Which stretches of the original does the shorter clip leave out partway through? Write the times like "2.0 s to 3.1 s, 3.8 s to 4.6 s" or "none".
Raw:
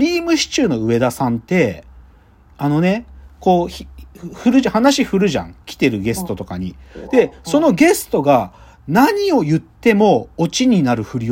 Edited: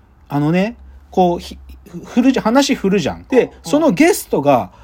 5.6 s to 7.1 s